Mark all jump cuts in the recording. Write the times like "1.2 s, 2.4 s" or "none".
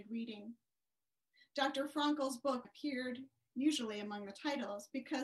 2.6 s